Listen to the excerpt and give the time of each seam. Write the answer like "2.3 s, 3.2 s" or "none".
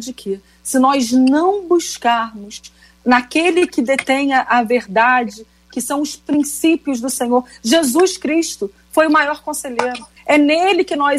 10.2 s